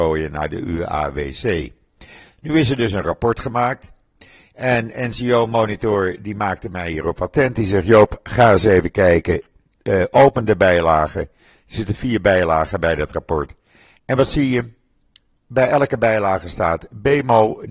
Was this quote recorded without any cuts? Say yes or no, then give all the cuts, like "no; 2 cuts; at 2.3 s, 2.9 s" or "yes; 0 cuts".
yes; 0 cuts